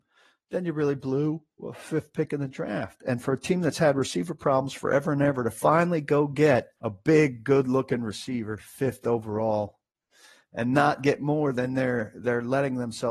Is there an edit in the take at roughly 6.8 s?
yes; 1 cut; at 6.8 s

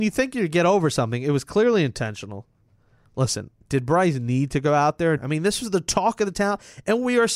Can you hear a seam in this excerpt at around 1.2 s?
no; 1 cut; at 5.2 s

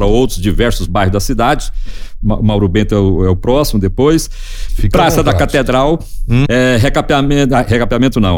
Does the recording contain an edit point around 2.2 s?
no; 2 cuts; at 4.7 s, 6.5 s

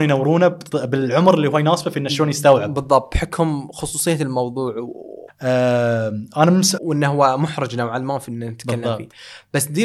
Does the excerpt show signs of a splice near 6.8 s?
yes; 2 cuts; at 5.3 s, 6.8 s

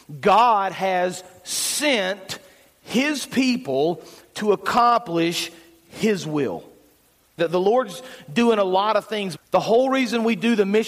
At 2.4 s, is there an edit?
no; 2 cuts; at 7.4 s, 9.3 s

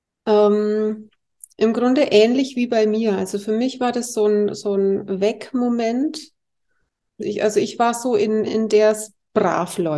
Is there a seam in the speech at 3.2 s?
no; 2 cuts; at 7.2 s, 8.5 s

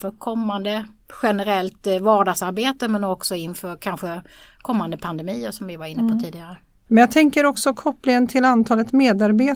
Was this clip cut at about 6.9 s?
yes; 1 cut; at 6.9 s

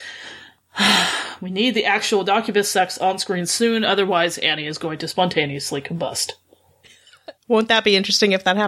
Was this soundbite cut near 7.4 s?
yes; 1 cut; at 7.4 s

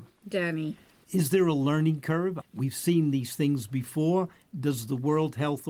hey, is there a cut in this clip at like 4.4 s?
no; 1 cut; at 2.4 s

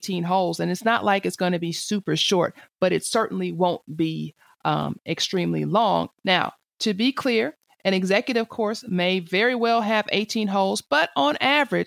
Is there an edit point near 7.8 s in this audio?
no; 1 cut; at 6.1 s

